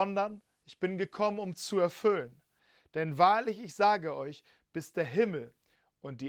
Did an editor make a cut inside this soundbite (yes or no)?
no